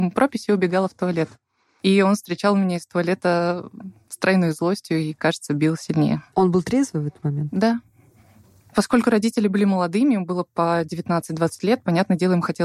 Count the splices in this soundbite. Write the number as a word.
zero